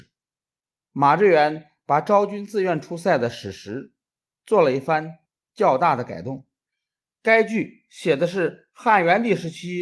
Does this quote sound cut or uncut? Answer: uncut